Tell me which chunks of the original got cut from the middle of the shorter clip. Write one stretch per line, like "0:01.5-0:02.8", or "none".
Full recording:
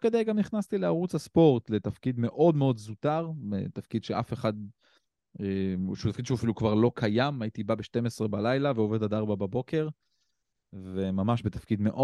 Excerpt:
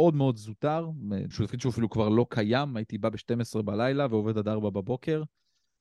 0:03.7-0:06.0